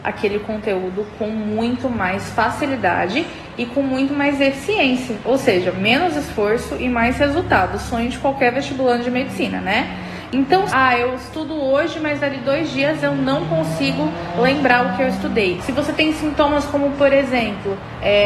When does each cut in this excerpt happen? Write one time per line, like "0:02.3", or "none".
0:10.7
0:15.6